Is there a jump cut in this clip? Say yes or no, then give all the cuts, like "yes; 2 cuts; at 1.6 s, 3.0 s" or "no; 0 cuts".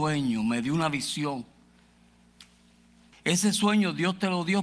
yes; 1 cut; at 3.1 s